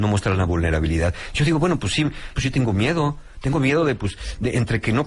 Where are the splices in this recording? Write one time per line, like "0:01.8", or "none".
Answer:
0:02.3